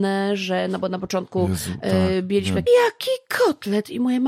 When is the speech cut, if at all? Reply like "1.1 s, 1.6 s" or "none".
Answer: 2.7 s